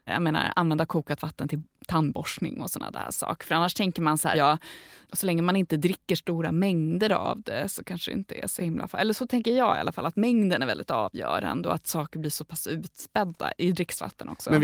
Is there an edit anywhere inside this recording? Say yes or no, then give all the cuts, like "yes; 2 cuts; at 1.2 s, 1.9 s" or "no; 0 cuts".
yes; 1 cut; at 4.3 s